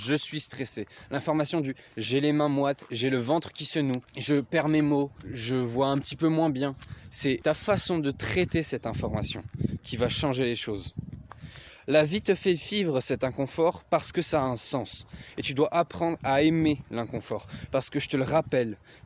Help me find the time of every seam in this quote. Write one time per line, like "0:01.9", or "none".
none